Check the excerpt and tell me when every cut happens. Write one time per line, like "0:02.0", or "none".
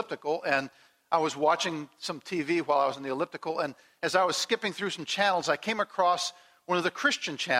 none